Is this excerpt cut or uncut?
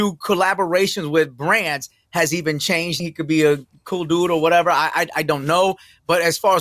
cut